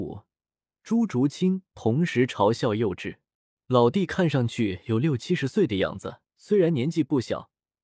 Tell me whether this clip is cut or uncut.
cut